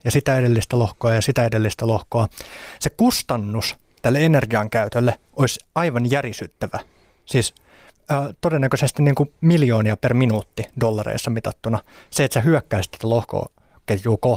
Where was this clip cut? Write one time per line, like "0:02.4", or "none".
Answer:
0:02.8